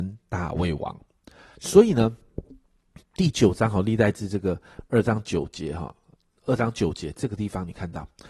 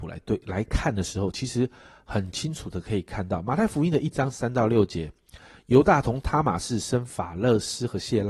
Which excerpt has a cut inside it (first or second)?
first